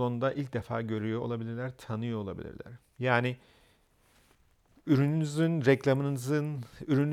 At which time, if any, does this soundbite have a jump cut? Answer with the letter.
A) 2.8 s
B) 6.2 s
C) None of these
A